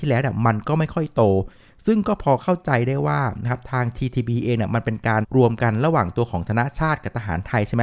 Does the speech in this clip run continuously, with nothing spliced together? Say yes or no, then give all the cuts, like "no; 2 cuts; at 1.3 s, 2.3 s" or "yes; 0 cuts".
no; 1 cut; at 5.2 s